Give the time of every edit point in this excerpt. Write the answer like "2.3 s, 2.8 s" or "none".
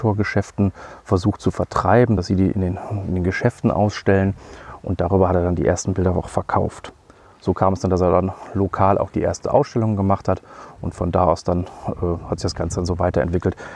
none